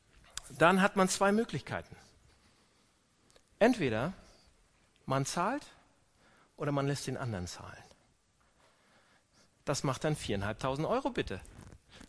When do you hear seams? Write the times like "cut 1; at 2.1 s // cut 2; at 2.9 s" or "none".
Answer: none